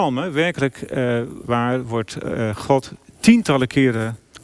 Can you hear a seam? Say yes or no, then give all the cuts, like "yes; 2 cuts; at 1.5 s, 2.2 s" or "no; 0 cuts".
yes; 1 cut; at 1.4 s